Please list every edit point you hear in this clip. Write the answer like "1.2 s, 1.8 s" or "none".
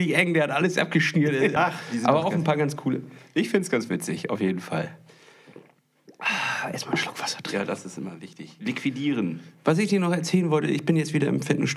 1.6 s